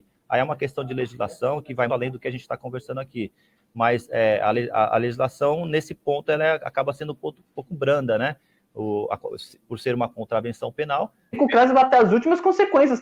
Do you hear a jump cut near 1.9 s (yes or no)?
yes